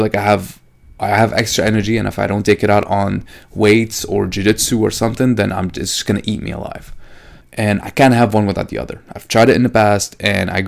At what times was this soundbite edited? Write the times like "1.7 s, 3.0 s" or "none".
7.4 s